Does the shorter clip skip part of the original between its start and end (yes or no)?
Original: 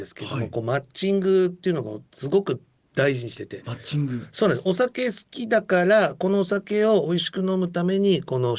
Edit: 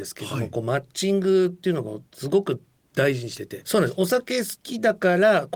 yes